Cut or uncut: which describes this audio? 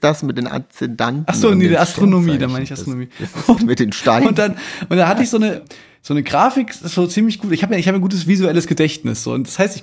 cut